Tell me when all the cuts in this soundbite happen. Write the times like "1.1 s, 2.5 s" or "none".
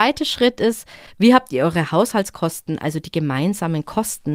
none